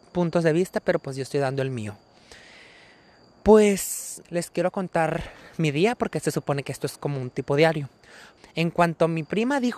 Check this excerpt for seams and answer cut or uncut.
cut